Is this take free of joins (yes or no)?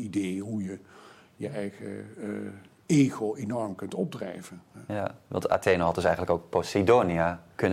yes